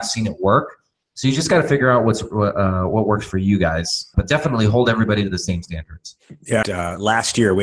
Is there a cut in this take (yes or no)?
yes